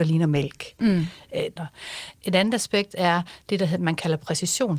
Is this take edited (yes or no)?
yes